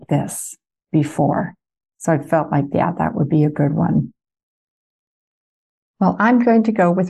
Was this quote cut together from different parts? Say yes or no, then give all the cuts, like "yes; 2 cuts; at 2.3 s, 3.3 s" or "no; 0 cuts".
yes; 1 cut; at 5.9 s